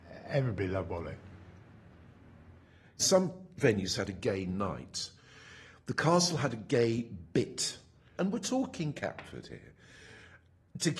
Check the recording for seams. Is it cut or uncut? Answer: cut